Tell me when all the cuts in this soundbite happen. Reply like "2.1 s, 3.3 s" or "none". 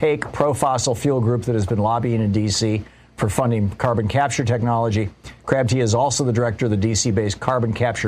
none